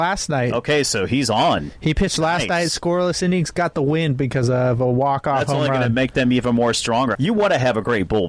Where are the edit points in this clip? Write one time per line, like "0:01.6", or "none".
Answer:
0:07.1